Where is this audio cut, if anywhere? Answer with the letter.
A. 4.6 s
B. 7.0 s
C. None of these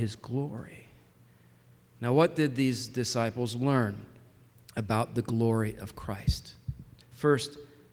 B